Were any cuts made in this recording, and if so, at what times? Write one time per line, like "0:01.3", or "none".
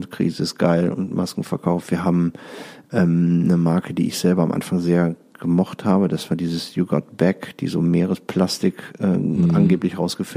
none